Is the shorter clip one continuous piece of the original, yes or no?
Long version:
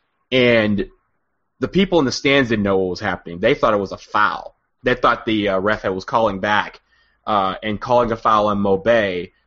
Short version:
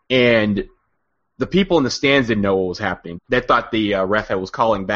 no